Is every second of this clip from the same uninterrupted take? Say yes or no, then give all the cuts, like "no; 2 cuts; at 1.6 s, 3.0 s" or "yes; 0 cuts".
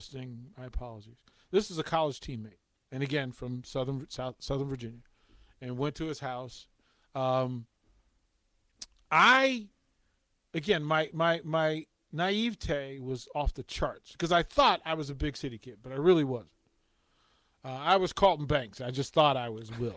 no; 1 cut; at 2.7 s